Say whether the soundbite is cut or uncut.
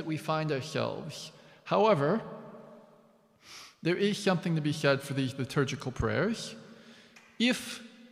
uncut